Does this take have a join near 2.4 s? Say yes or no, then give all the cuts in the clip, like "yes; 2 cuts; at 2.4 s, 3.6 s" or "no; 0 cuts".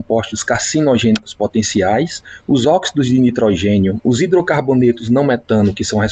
no; 1 cut; at 4.0 s